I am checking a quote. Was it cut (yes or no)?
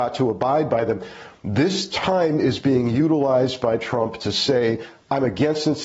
no